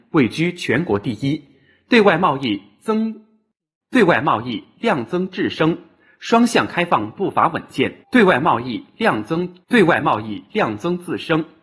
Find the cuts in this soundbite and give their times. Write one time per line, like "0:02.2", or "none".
0:08.0
0:09.6